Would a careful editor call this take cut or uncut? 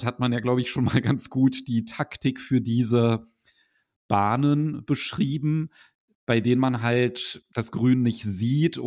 uncut